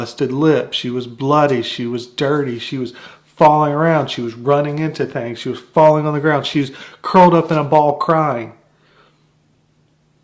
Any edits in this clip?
no; 0 cuts

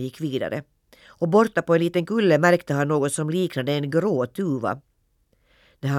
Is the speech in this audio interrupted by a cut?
no; 0 cuts

